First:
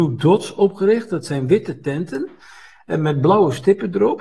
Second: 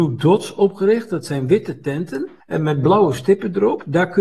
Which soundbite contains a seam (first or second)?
second